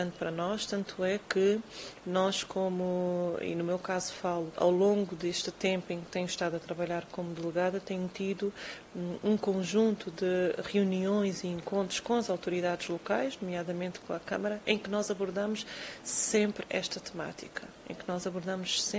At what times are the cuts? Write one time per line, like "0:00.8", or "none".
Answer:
0:04.6